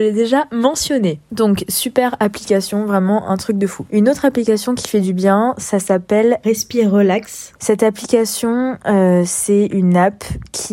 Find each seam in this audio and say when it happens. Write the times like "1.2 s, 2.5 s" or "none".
none

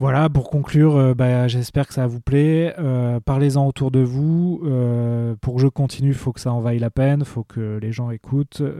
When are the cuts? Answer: none

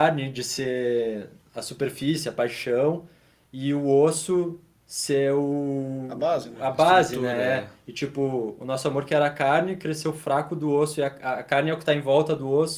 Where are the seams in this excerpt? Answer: none

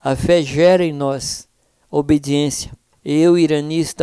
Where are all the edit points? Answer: 2.9 s

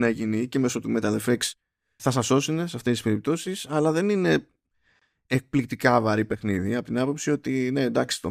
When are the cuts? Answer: 2.0 s

